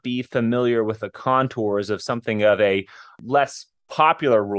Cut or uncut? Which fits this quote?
uncut